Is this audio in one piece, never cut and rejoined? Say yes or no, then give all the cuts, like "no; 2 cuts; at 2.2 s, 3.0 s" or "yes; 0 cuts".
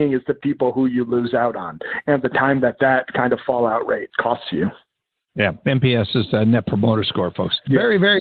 yes; 0 cuts